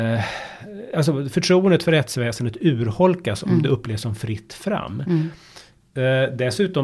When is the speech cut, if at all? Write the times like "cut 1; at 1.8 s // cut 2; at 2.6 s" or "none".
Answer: none